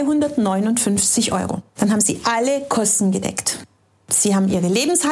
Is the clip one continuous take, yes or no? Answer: no